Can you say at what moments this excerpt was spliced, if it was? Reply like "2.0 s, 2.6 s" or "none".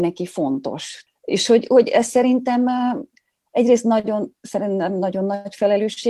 1.1 s